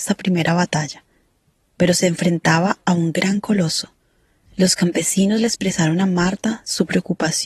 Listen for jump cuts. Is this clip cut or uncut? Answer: cut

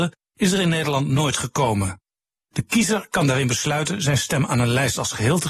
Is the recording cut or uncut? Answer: cut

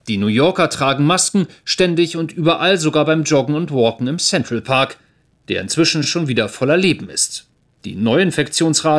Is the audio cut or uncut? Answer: uncut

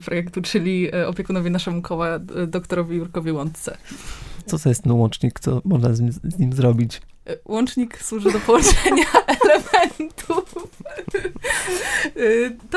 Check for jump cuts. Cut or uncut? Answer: uncut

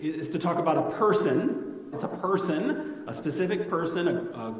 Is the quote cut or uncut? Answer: cut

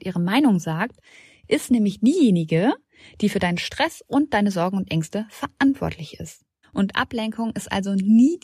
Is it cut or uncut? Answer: cut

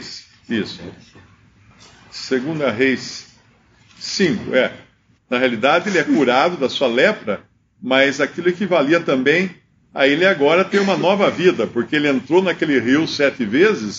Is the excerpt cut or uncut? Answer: cut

